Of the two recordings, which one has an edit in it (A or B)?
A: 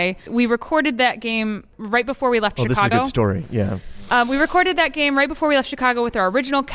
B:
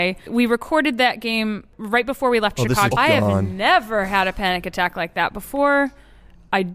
B